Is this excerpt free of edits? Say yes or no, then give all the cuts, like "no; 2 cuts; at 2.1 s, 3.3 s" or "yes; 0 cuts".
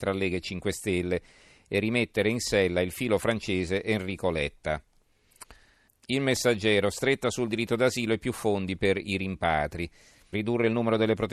no; 2 cuts; at 5.9 s, 10.3 s